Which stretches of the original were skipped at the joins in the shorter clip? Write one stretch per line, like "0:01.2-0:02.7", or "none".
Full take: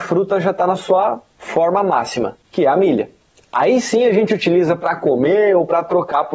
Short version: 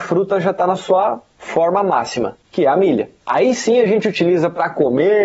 0:03.2-0:03.5